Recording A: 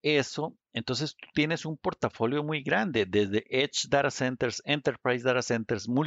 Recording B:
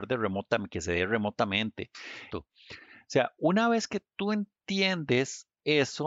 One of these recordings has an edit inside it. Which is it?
B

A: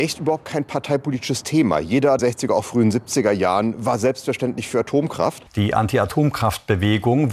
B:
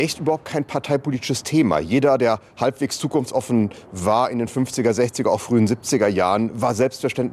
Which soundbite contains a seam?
A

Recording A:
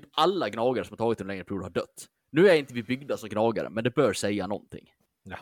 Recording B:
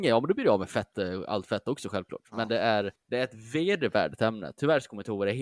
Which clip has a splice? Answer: B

